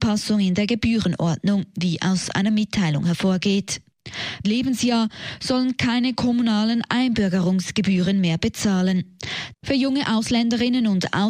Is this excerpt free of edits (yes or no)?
no